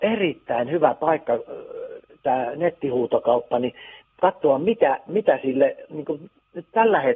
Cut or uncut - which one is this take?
uncut